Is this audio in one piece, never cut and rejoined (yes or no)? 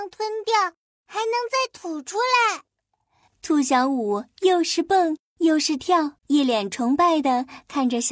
no